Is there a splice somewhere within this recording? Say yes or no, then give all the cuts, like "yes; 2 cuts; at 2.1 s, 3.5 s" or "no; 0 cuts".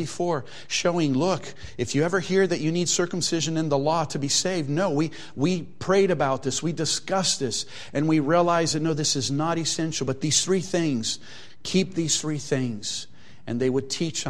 no; 0 cuts